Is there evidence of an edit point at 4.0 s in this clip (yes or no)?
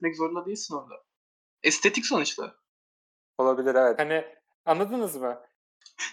yes